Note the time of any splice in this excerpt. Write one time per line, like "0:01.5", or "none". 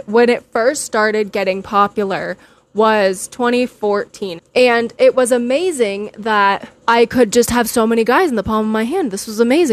0:04.4
0:06.8